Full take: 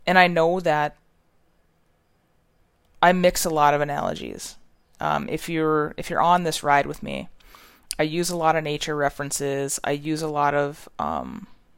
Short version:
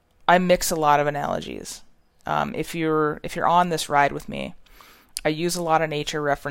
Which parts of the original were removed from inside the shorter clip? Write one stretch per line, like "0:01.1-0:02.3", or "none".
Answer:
none